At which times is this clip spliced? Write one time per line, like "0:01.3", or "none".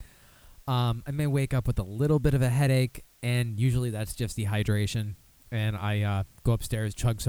none